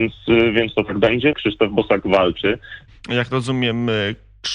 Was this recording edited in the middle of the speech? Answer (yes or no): yes